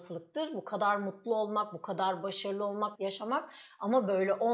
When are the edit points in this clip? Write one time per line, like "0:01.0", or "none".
0:02.9